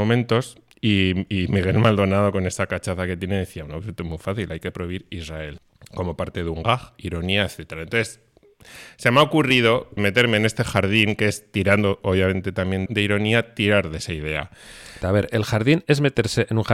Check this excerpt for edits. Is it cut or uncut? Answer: cut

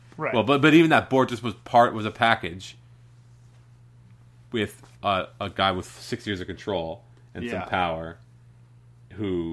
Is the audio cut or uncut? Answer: uncut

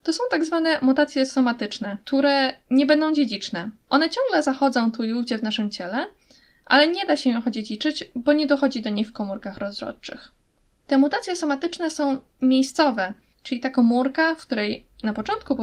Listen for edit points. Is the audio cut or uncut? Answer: cut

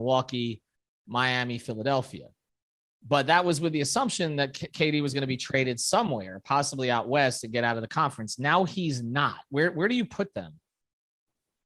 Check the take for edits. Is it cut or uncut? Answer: uncut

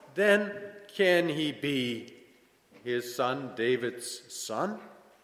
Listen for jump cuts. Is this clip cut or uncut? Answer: uncut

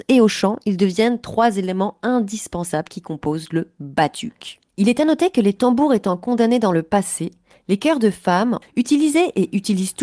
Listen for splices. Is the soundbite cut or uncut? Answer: cut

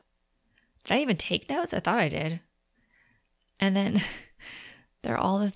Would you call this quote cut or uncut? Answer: uncut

